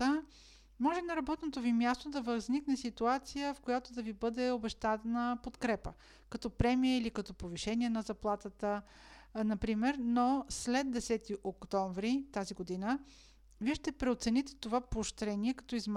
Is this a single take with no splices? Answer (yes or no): yes